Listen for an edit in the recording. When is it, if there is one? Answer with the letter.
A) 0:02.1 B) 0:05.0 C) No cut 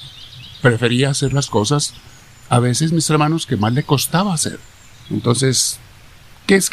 B